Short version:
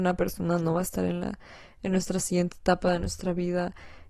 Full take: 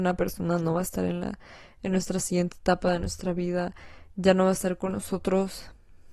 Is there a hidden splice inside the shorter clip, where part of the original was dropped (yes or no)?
no